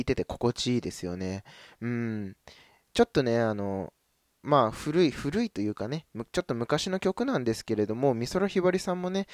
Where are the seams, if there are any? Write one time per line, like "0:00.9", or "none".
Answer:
none